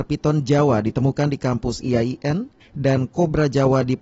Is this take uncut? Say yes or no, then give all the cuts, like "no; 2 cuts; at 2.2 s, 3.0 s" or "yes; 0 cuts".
no; 1 cut; at 2.6 s